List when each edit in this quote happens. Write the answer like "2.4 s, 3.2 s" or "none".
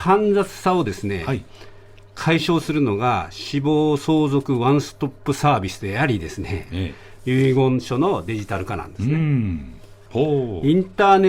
10.1 s